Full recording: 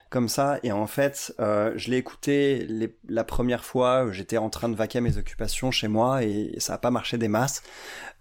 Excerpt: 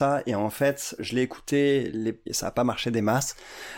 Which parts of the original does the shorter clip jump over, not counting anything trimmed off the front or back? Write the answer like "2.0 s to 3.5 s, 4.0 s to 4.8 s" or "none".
1.3 s to 1.7 s, 3.0 s to 6.5 s